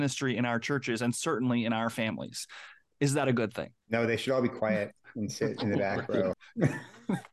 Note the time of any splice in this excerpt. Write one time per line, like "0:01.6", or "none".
0:03.8
0:06.3